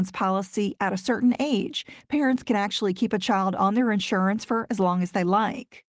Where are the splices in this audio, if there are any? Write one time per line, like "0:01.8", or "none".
none